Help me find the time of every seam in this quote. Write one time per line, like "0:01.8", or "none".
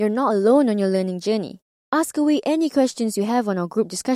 0:01.8